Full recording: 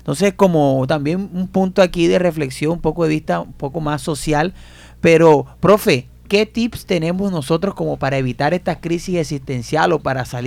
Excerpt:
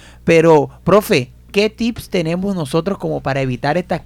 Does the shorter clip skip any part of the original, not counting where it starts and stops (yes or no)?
no